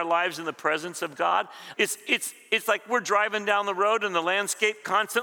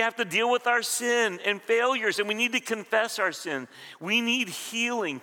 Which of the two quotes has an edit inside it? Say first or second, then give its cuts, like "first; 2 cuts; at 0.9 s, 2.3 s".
first; 1 cut; at 1.7 s